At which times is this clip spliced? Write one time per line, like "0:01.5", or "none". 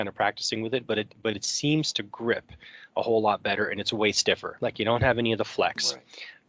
none